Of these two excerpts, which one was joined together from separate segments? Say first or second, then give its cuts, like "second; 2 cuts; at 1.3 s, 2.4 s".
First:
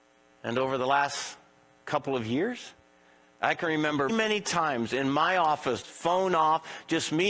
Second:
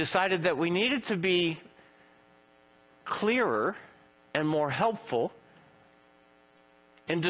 first; 2 cuts; at 4.1 s, 5.8 s